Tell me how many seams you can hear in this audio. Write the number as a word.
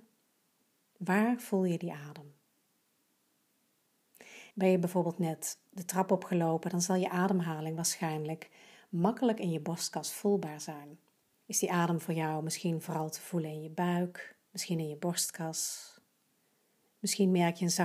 three